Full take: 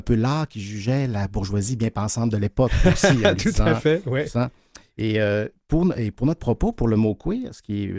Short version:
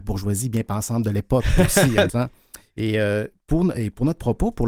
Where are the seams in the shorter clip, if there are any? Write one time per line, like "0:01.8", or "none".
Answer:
0:02.1